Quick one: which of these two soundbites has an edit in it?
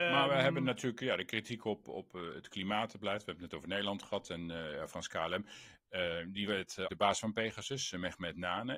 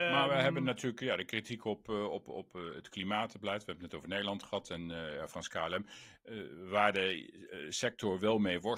first; 3 cuts; at 1.8 s, 5.8 s, 6.9 s

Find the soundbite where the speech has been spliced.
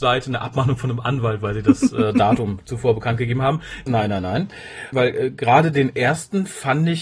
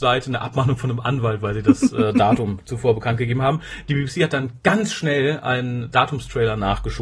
first; 2 cuts; at 3.9 s, 4.9 s

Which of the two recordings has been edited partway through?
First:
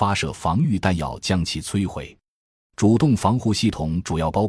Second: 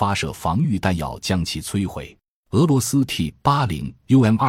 second; 1 cut; at 2.4 s

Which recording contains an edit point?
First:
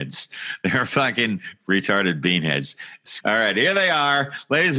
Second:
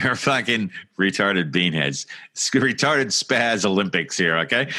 first; 1 cut; at 3.2 s

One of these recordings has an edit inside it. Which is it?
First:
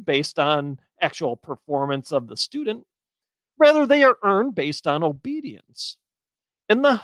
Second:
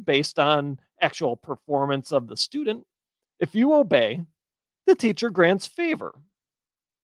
second; 1 cut; at 3.2 s

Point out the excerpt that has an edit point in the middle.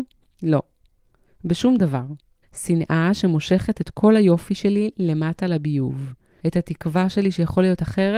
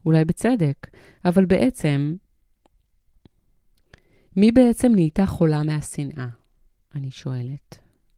first; 2 cuts; at 2.4 s, 6.4 s

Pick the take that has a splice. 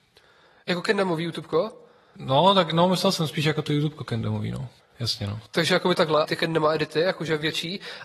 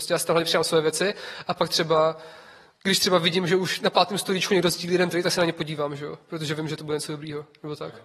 first; 2 cuts; at 4.8 s, 6.2 s

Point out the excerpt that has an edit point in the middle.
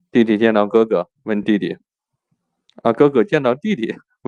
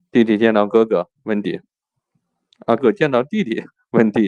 second; 2 cuts; at 1.4 s, 2.8 s

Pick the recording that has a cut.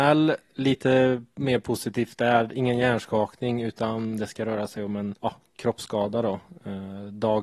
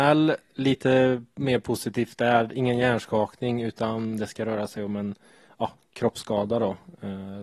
first; 1 cut; at 5.2 s

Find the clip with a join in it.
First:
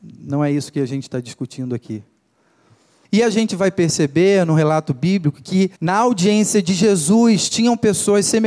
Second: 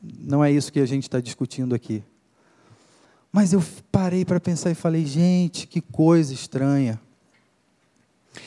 first; 2 cuts; at 3.0 s, 5.8 s

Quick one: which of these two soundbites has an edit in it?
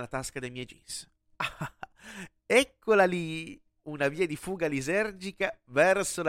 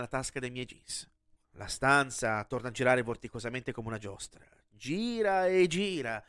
second; 1 cut; at 1.4 s

